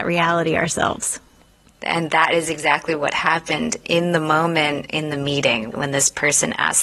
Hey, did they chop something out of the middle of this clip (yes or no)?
yes